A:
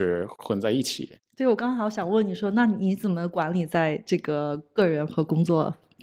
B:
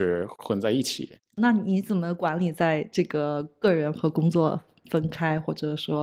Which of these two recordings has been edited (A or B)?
B